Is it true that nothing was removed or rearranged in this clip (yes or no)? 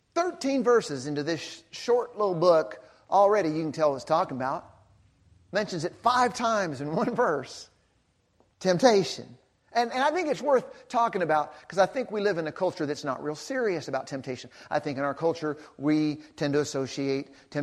yes